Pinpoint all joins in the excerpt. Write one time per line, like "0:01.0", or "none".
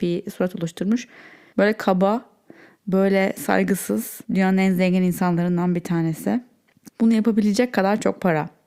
0:01.5
0:04.2
0:06.9

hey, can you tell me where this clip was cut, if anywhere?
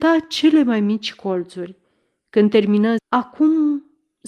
0:03.0

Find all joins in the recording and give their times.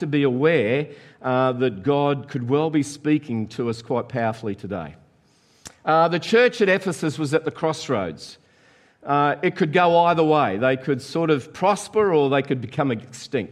none

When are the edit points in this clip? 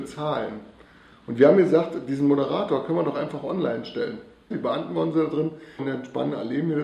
0:04.5
0:05.8

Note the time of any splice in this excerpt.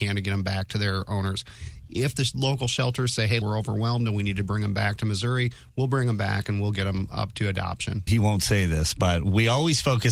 0:03.4
0:08.1

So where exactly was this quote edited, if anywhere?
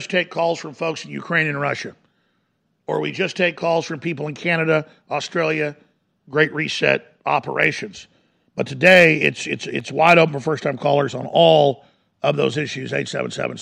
0:06.2

